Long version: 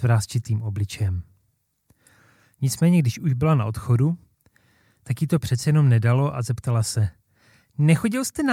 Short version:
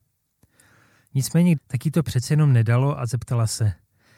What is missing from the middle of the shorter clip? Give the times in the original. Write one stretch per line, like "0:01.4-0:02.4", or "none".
0:03.0-0:04.9